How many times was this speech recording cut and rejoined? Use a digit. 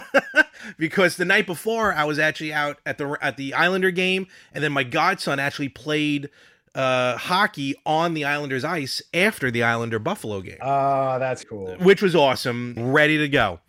2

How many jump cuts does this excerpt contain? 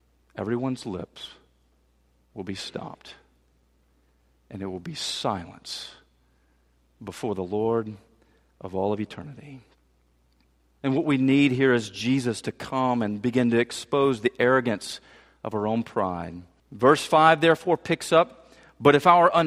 2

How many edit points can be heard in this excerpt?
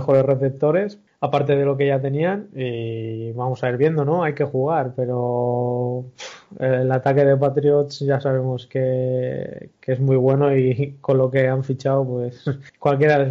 0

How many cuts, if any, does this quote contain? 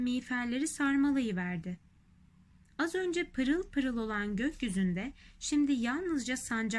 0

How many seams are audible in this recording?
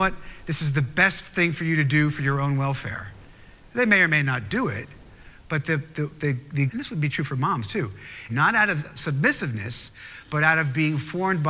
2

